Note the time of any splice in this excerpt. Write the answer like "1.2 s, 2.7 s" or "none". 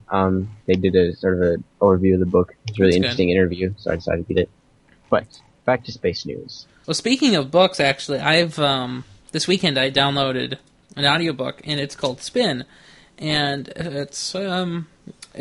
6.8 s